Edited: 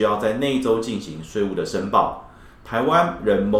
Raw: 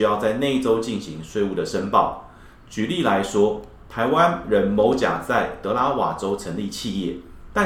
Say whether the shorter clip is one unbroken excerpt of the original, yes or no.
no